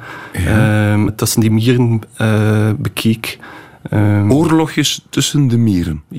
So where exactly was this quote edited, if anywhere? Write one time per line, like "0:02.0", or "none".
0:01.1